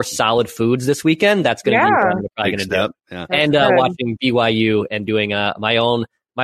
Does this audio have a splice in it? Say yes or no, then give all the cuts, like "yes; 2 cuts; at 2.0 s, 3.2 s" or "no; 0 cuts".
no; 0 cuts